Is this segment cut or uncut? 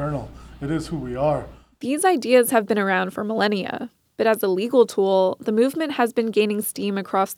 uncut